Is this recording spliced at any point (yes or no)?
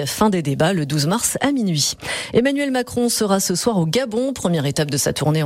no